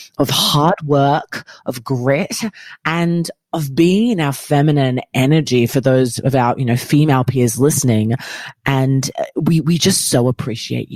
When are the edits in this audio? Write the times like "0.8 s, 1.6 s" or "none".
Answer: none